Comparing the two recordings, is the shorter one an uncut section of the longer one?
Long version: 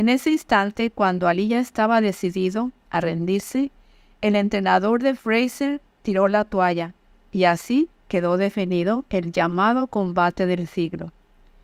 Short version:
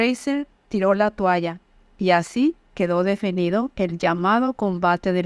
yes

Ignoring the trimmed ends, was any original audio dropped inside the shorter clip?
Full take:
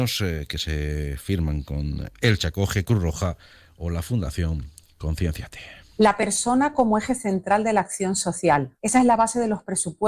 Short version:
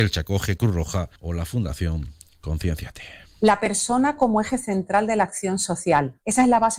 yes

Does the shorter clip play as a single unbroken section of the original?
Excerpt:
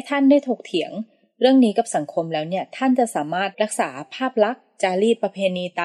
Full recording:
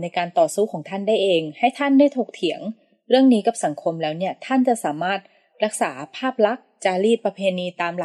no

